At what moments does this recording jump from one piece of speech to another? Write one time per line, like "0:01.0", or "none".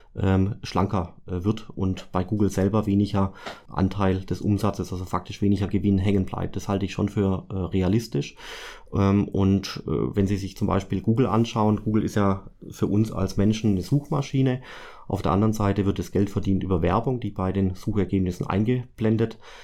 0:03.7

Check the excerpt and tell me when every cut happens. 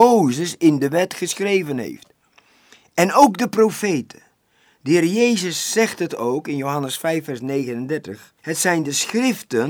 0:08.4

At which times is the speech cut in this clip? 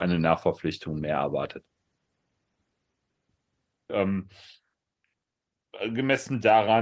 0:03.9

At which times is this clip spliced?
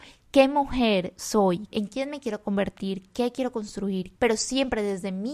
0:01.7
0:03.1
0:04.2

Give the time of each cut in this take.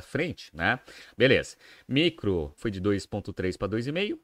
0:01.1
0:02.6

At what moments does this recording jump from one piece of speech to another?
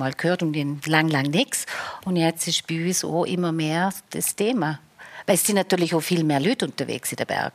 none

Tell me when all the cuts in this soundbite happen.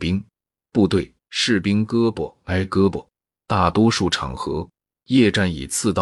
0:01.2

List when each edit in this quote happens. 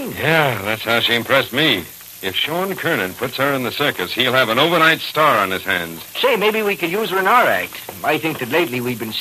none

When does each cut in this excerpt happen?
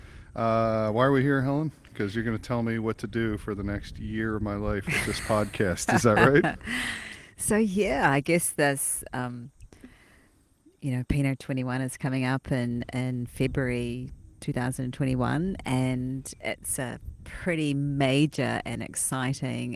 none

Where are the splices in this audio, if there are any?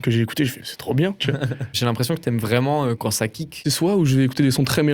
0:01.2

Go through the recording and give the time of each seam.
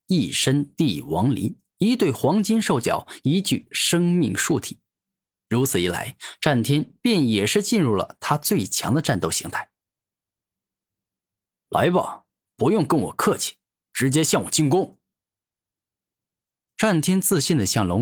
none

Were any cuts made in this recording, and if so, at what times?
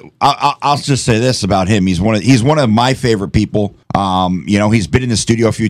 0:03.8

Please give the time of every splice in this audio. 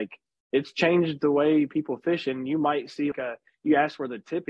0:03.1

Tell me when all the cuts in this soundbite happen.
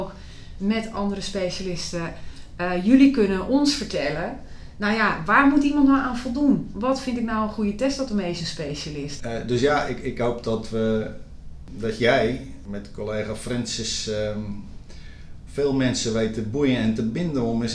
0:09.2

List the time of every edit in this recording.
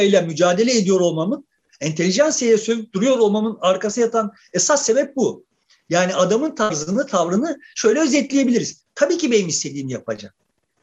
0:08.9

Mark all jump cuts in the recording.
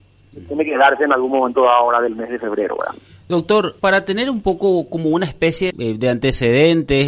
0:03.8
0:05.7

